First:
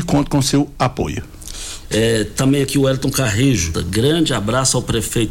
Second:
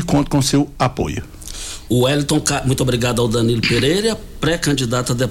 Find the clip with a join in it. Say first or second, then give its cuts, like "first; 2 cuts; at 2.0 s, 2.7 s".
first; 2 cuts; at 1.8 s, 3.7 s